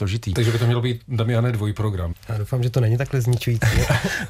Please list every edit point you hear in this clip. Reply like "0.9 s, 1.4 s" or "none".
2.1 s